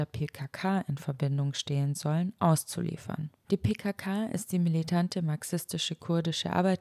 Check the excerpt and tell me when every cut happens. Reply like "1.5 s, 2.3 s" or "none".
3.4 s